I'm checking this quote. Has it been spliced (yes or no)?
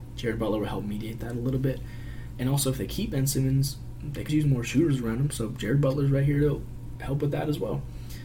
yes